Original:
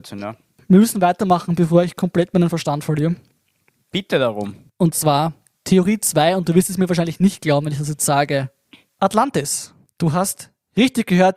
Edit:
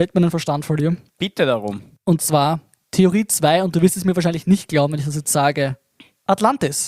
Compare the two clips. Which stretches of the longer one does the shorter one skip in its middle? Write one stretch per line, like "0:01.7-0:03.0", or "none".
0:03.3-0:03.8